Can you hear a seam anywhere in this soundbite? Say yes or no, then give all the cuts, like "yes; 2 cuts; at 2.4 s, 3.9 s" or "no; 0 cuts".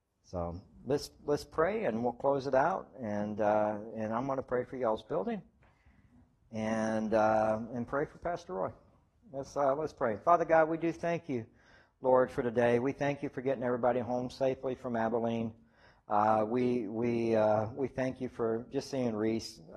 no; 0 cuts